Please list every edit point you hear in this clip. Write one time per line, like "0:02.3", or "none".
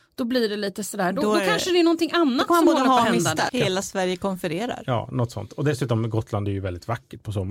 0:03.5